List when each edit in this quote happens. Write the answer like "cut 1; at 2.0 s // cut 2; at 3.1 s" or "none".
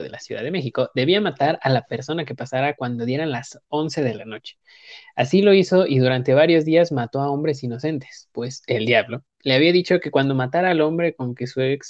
none